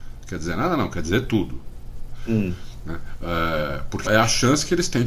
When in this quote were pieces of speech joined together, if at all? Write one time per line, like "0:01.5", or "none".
0:04.1

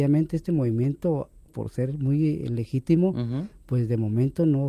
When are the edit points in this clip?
0:01.5

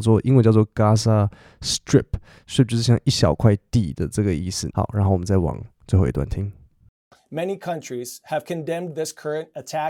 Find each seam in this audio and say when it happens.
0:04.7

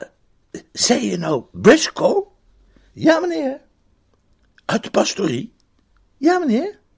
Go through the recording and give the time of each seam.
none

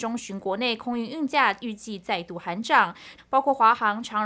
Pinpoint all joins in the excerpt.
0:03.2

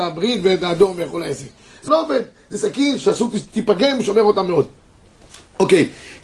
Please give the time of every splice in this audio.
0:01.9

